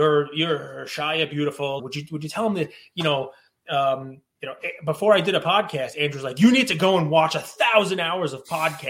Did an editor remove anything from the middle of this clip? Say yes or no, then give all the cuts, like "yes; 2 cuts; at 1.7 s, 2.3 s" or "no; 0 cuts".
yes; 1 cut; at 1.8 s